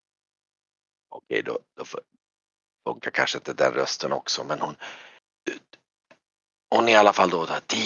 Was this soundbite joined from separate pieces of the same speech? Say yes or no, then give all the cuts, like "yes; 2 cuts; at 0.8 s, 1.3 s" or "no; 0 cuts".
no; 0 cuts